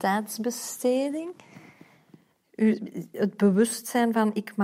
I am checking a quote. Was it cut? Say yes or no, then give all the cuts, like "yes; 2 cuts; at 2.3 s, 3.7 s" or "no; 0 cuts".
no; 0 cuts